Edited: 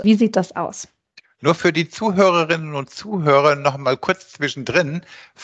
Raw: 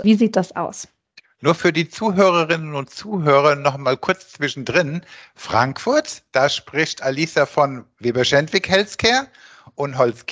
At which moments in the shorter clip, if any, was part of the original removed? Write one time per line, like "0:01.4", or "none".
none